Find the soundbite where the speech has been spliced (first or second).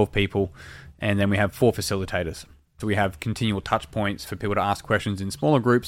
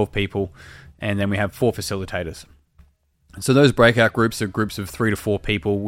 first